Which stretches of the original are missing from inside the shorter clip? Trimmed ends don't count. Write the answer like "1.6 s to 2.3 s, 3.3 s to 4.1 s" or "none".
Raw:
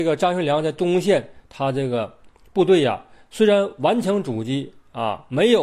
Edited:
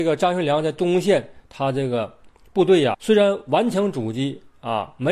2.9 s to 3.3 s